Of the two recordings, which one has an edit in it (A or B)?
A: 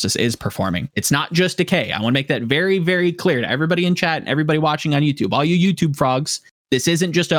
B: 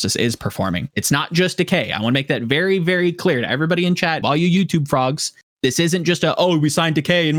B